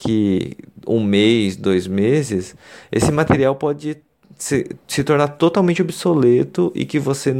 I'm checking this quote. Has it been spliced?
no; 0 cuts

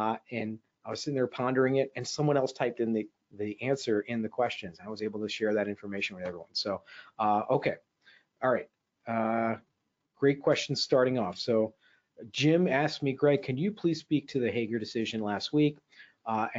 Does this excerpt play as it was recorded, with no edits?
yes; 0 cuts

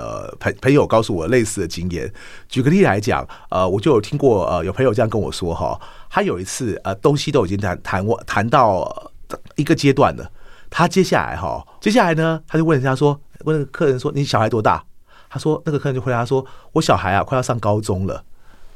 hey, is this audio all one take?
no; 2 cuts; at 11.8 s, 13.4 s

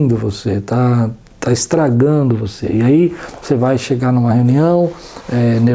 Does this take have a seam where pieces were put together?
yes; 1 cut; at 1.2 s

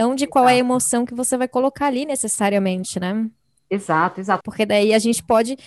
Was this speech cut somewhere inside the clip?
yes; 1 cut; at 4.4 s

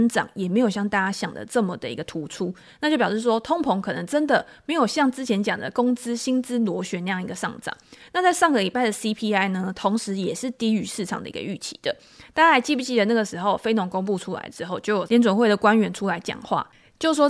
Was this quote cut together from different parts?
no; 0 cuts

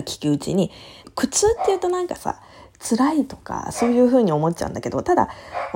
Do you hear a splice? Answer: yes; 1 cut; at 1.0 s

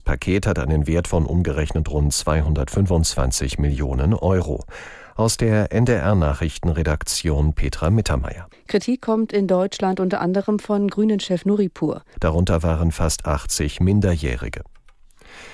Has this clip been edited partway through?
yes; 2 cuts; at 8.5 s, 12.1 s

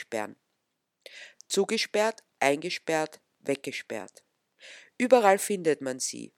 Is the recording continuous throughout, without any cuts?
yes; 0 cuts

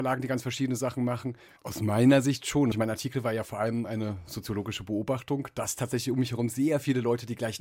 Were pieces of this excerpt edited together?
yes; 2 cuts; at 1.5 s, 2.7 s

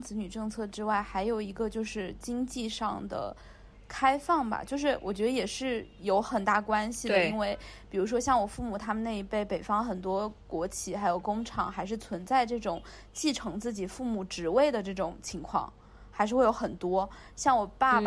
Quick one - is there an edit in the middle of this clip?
no; 0 cuts

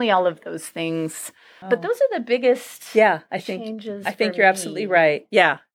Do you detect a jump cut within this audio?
yes; 1 cut; at 1.6 s

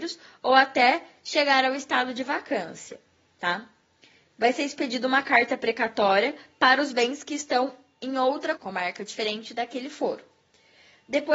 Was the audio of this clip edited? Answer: yes; 1 cut; at 8.6 s

